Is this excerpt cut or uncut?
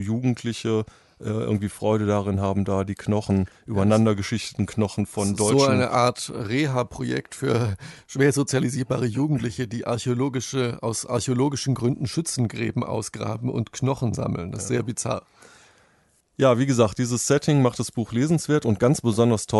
uncut